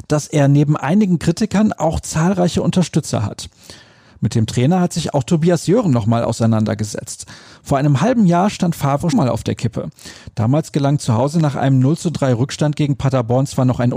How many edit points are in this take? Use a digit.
1